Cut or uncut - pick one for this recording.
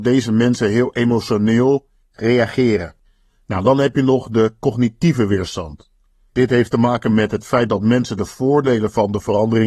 uncut